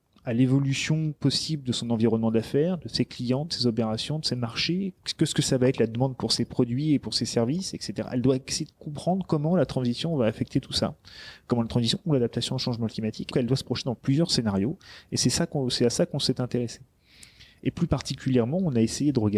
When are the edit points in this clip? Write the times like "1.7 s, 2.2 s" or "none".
13.3 s